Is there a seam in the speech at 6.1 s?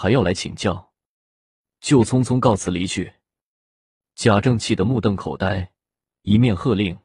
yes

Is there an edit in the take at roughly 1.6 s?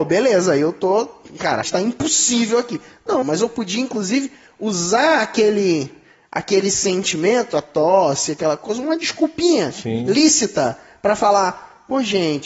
yes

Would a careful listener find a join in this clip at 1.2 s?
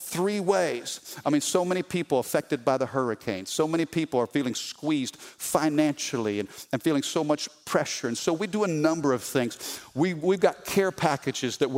yes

